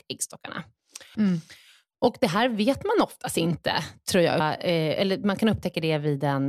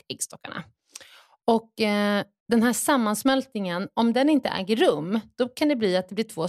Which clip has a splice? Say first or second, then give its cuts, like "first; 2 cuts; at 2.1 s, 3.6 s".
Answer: first; 2 cuts; at 1.2 s, 4.4 s